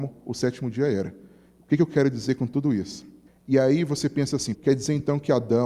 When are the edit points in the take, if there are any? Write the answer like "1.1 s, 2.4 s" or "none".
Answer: 3.3 s, 4.5 s